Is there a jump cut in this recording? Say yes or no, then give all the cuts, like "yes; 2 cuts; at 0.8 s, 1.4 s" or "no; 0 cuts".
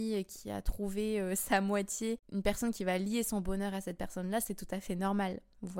no; 0 cuts